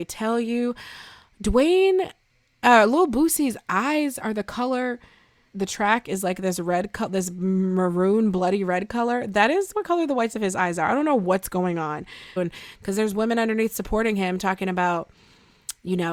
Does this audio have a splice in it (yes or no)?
yes